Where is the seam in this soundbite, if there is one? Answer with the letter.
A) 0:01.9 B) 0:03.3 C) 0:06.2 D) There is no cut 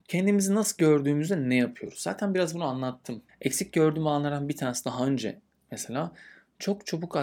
B